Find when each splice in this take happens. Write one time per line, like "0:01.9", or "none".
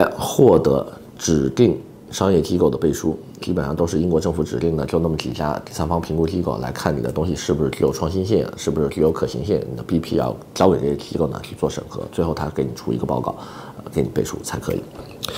0:03.4